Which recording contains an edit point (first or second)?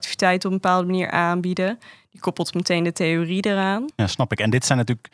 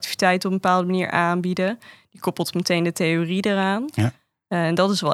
first